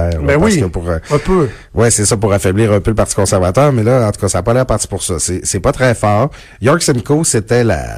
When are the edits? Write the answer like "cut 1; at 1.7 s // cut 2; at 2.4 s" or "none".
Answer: none